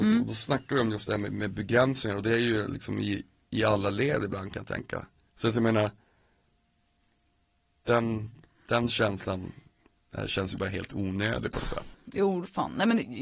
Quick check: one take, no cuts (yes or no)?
no